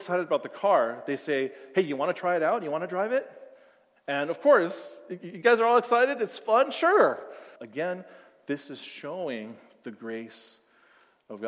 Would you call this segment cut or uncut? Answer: cut